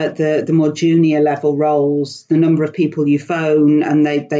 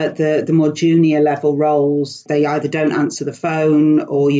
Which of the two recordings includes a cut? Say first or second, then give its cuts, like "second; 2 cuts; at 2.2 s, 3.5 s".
second; 1 cut; at 2.3 s